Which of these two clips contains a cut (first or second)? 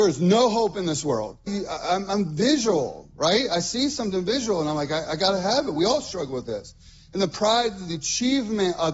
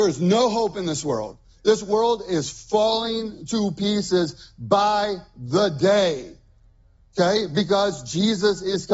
first